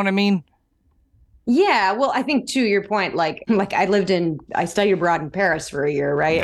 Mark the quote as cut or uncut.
cut